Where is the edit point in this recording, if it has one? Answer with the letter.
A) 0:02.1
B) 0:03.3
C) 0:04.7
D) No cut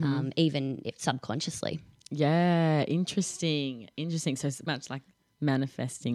C